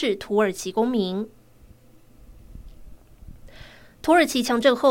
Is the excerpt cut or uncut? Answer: uncut